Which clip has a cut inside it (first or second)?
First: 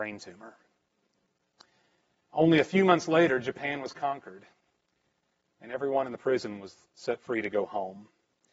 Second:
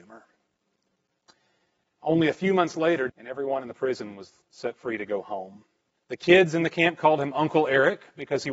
second